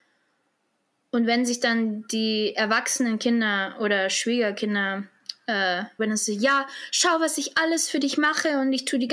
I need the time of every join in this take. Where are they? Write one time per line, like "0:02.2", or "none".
0:06.0